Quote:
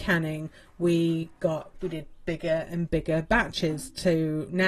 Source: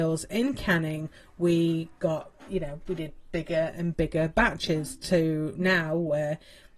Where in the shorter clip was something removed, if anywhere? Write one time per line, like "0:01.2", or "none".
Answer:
0:01.7